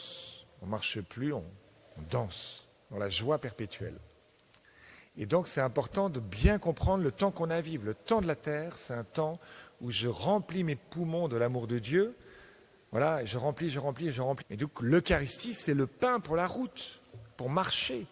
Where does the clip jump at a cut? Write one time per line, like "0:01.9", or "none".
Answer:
0:14.4